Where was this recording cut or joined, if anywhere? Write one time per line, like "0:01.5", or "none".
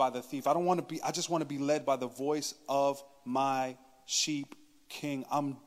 none